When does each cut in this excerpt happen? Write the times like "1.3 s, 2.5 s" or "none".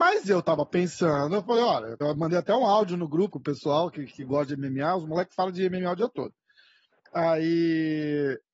2.0 s, 3.3 s